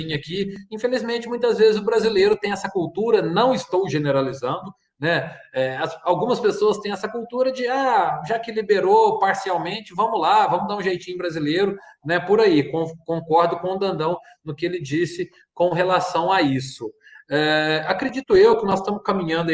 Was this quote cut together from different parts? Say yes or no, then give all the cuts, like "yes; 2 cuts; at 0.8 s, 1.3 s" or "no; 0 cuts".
no; 0 cuts